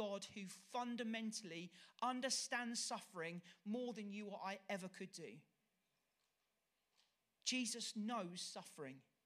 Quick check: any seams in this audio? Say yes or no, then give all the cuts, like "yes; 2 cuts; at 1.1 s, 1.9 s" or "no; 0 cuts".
no; 0 cuts